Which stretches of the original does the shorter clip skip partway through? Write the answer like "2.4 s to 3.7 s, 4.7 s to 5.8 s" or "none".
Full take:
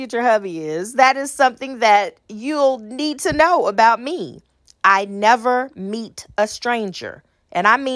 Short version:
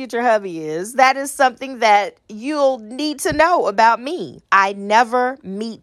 4.5 s to 4.8 s